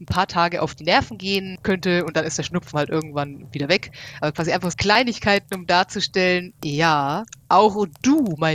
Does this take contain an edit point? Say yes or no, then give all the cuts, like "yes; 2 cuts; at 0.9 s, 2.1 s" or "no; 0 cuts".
yes; 1 cut; at 4.7 s